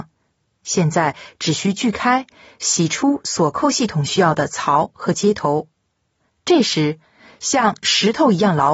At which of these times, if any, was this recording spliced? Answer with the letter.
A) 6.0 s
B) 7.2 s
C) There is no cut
C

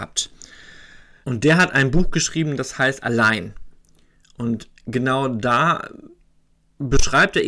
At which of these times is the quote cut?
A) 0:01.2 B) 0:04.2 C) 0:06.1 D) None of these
A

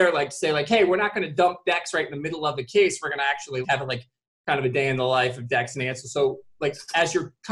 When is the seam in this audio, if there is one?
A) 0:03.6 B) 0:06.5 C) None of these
A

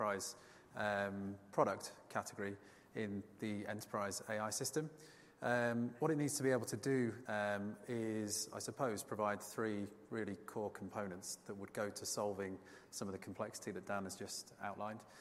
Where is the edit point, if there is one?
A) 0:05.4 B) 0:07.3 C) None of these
B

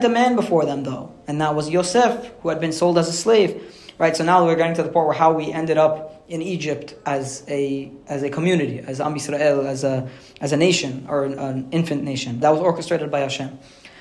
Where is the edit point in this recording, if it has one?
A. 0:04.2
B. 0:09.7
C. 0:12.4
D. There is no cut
C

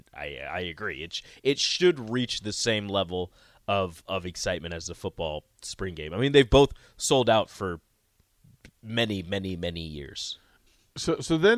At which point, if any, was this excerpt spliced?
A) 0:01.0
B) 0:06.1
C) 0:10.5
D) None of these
D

